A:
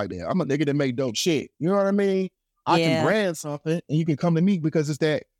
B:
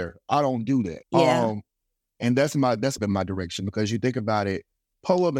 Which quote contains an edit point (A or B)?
B